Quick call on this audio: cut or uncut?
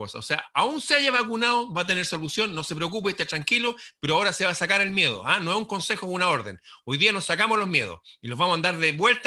uncut